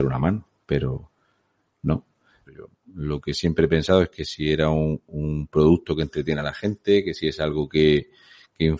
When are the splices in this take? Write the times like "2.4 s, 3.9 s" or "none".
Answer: 2.5 s

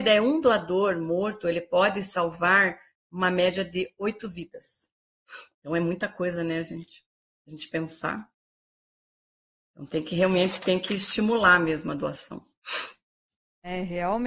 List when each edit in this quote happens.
none

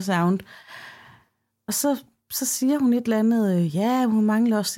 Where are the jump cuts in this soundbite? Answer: none

